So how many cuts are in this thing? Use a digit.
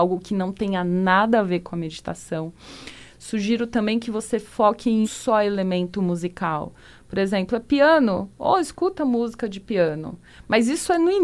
1